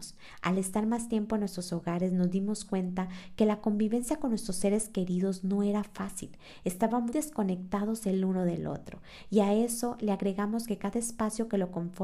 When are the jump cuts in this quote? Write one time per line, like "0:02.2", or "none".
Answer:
0:07.1